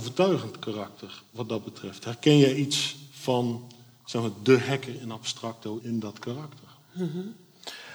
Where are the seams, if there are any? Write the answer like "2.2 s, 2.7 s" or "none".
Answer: 5.8 s